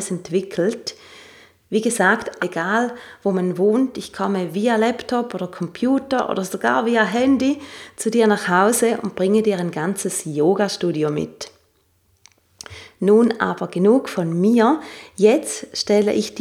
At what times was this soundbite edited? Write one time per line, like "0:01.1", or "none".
0:02.4